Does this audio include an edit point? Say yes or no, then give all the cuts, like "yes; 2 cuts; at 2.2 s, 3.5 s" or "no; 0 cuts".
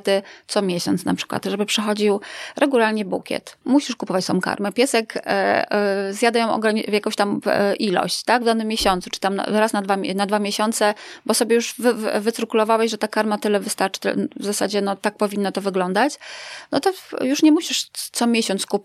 yes; 1 cut; at 3.6 s